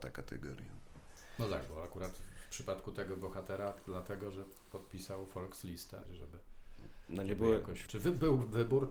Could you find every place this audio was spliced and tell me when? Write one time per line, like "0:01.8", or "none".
0:06.0
0:07.9